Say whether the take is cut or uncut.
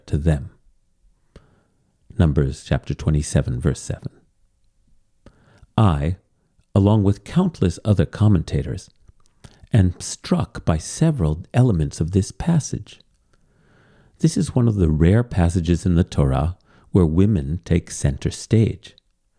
uncut